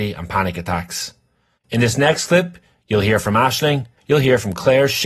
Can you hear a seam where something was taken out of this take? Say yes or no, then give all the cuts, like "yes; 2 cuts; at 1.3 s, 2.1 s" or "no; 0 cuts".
yes; 2 cuts; at 1.6 s, 4.0 s